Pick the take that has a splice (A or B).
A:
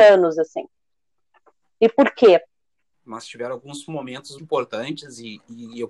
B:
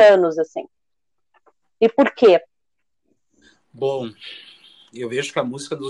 A